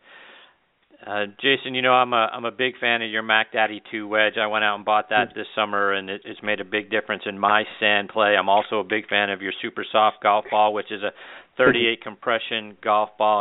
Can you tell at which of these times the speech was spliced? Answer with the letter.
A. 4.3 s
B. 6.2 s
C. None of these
B